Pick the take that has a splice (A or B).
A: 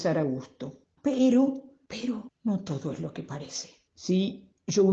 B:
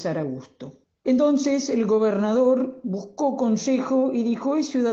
A